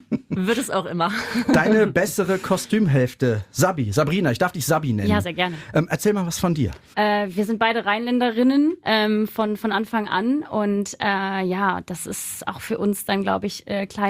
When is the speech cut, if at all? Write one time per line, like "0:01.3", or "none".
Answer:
0:06.9